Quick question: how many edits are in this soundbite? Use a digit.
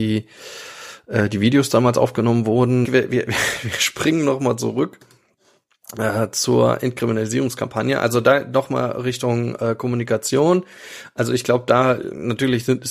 1